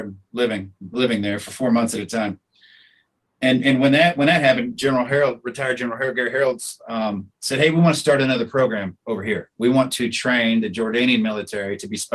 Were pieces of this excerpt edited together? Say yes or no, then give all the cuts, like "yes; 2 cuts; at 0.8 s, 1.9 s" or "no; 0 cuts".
no; 0 cuts